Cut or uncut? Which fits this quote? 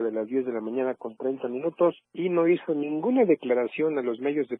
cut